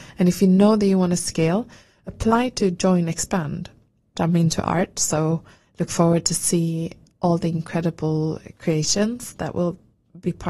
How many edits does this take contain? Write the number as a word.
one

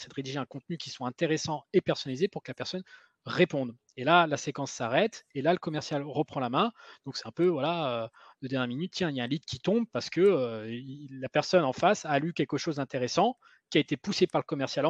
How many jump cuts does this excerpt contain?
zero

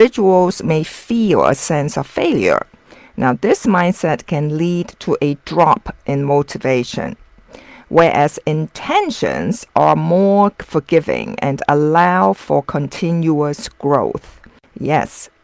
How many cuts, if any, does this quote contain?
zero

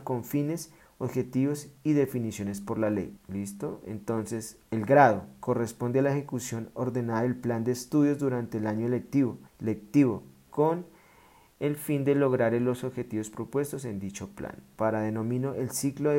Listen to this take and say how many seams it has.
three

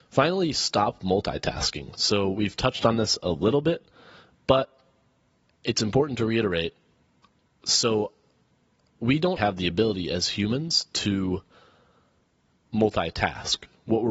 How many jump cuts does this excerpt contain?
one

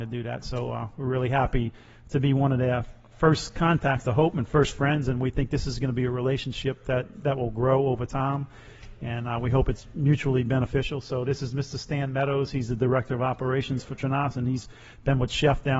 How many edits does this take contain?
zero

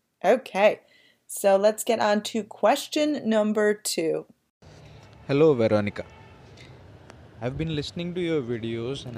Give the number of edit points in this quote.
zero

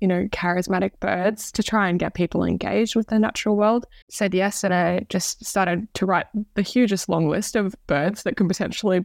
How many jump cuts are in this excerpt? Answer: one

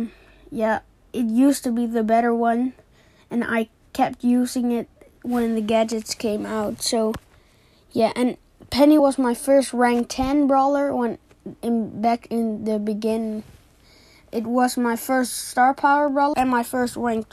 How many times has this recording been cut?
two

